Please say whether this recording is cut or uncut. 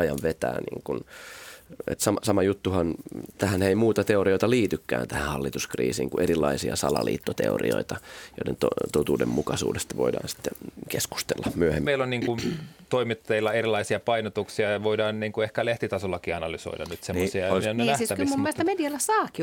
cut